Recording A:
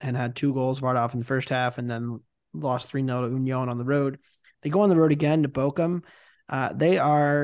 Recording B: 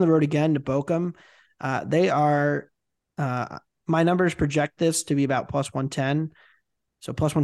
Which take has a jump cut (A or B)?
B